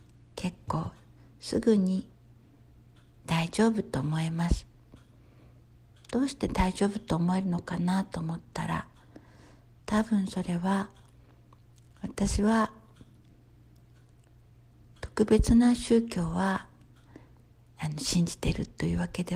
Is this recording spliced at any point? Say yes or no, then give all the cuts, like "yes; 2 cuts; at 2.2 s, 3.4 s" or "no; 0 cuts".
no; 0 cuts